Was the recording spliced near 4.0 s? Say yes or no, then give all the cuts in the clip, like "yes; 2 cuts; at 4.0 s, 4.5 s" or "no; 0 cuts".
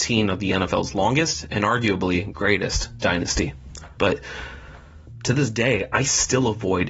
yes; 1 cut; at 4.0 s